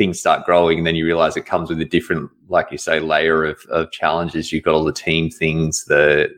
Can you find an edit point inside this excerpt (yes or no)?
no